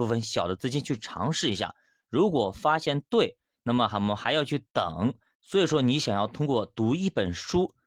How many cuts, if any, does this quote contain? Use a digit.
1